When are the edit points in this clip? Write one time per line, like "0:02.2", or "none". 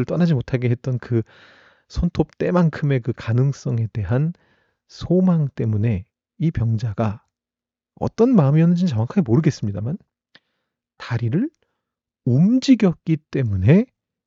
none